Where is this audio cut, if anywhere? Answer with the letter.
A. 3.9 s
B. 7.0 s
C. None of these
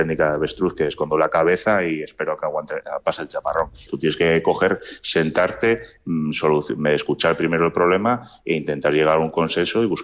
A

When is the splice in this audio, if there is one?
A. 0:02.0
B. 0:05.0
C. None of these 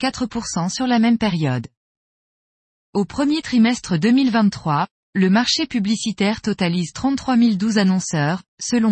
C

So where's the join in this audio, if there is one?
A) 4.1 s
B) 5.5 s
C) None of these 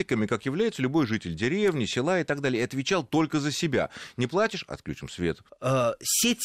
B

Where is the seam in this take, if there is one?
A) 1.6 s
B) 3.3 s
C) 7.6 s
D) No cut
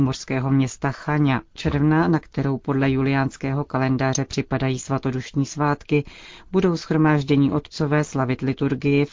A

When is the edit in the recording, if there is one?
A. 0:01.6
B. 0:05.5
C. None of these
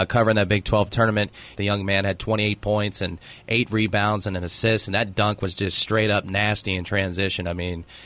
A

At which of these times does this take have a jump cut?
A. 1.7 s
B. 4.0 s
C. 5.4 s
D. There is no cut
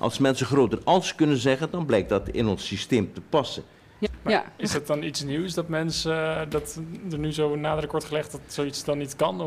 B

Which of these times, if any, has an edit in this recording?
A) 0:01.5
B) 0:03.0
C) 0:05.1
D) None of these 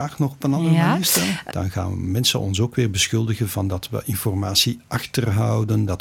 A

